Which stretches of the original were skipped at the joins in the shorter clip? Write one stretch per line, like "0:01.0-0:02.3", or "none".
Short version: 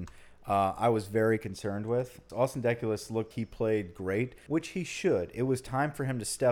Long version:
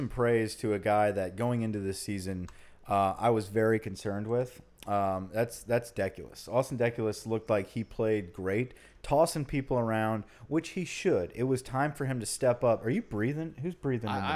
0:04.7-0:06.5
0:07.5-0:07.7
0:08.9-0:10.5